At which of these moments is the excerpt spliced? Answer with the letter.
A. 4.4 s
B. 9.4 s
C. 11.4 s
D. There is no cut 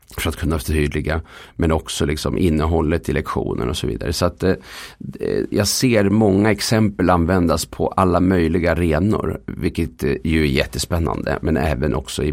C